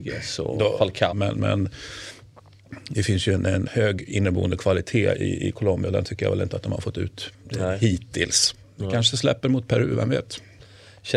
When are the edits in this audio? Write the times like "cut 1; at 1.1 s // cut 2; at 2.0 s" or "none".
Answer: cut 1; at 1.1 s // cut 2; at 3.7 s